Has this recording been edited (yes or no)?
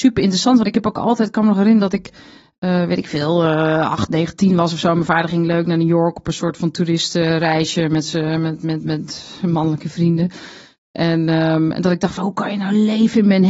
no